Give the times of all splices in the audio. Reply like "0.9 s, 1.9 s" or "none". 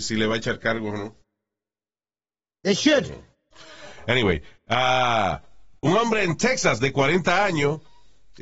none